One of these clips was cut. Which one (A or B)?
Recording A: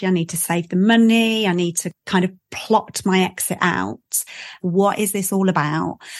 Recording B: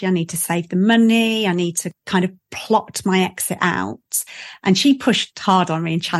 A